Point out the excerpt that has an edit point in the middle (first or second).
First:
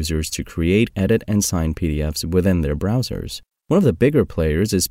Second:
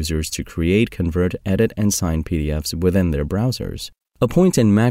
first